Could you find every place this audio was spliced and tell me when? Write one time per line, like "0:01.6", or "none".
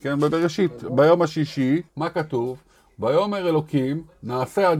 0:01.9